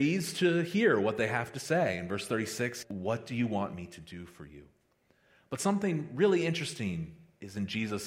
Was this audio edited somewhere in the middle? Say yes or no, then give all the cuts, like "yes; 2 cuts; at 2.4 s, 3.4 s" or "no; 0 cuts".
yes; 1 cut; at 2.8 s